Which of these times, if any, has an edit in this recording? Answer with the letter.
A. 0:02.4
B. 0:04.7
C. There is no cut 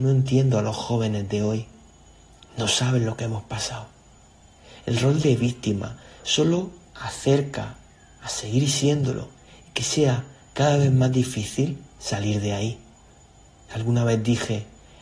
C